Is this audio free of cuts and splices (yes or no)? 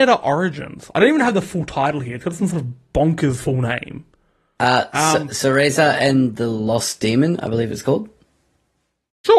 yes